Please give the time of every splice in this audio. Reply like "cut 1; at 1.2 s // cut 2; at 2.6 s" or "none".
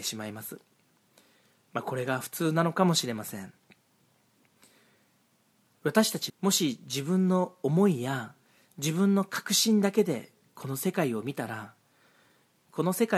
cut 1; at 6.3 s